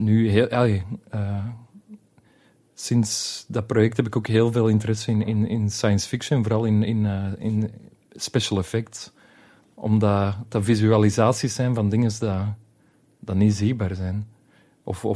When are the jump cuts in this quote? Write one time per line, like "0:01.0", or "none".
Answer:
none

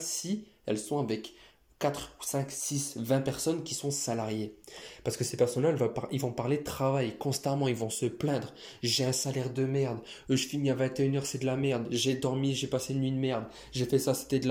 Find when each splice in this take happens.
none

